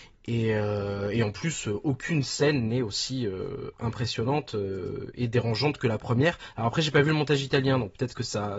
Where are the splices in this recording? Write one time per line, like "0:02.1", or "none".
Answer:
none